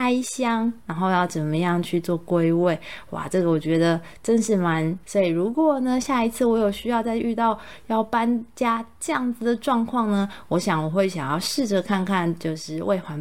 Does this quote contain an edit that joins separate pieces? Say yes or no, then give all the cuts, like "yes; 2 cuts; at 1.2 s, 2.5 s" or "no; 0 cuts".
yes; 1 cut; at 5.0 s